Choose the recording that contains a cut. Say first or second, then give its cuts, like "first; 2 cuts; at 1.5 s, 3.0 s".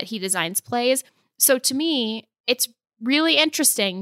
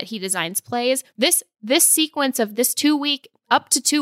second; 1 cut; at 1.1 s